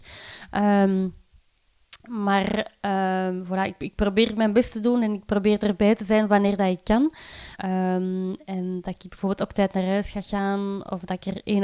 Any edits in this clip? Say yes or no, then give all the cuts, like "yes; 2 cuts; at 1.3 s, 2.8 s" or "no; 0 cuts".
yes; 1 cut; at 7.6 s